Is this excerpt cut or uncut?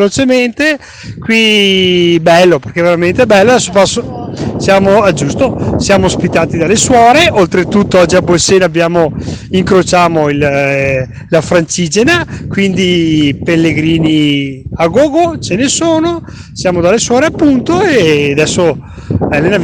uncut